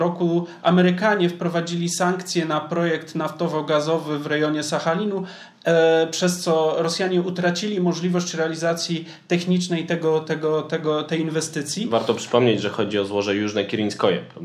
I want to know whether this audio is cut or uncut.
uncut